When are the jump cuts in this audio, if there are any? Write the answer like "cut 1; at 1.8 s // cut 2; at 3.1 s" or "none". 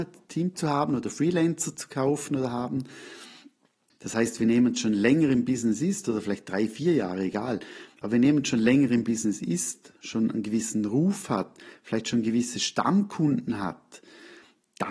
cut 1; at 3.9 s